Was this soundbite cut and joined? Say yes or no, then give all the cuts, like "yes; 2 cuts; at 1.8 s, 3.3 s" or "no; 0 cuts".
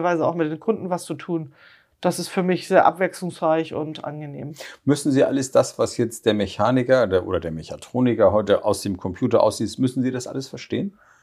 no; 0 cuts